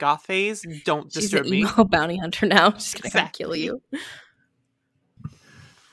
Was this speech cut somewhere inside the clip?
no; 0 cuts

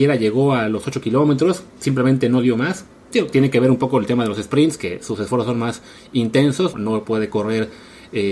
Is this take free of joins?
no; 1 cut; at 6.7 s

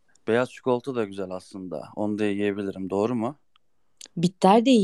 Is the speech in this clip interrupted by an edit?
no; 0 cuts

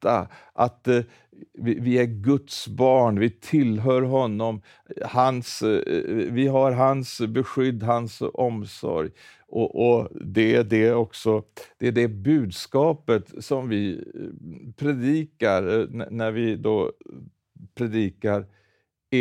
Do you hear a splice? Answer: no; 0 cuts

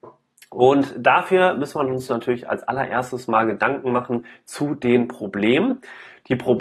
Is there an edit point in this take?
no; 0 cuts

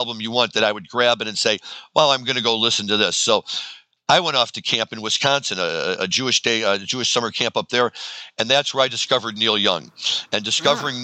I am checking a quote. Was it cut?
no; 0 cuts

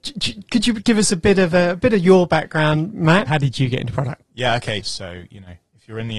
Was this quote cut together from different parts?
yes; 2 cuts; at 3.3 s, 4.8 s

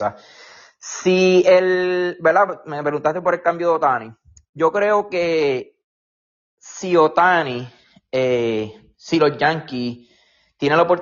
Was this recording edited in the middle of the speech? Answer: no; 0 cuts

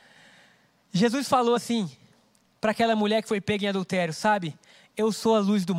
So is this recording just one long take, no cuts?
yes; 0 cuts

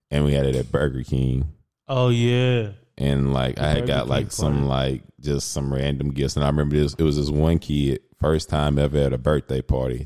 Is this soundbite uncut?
yes; 0 cuts

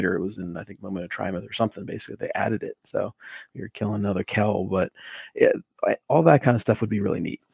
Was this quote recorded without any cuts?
yes; 0 cuts

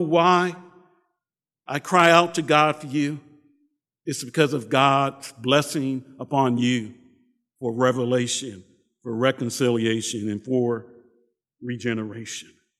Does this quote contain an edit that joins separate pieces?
no; 0 cuts

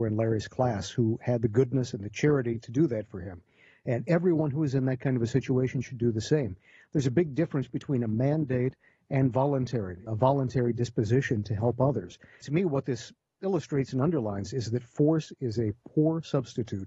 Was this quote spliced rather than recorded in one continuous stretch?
yes; 2 cuts; at 10.1 s, 12.4 s

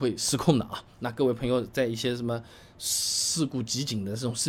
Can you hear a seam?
no; 0 cuts

